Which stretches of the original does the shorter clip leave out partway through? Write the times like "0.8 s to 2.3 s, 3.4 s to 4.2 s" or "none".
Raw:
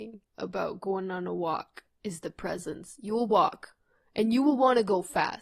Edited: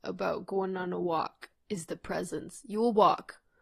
none